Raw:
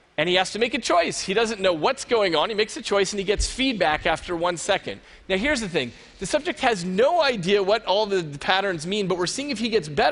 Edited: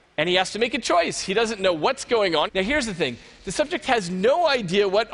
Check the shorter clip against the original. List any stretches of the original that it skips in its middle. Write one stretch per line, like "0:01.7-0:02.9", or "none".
0:02.5-0:05.2